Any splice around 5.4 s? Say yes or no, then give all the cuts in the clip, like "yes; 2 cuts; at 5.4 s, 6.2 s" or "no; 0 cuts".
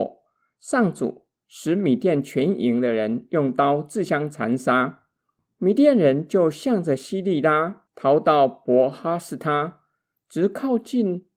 no; 0 cuts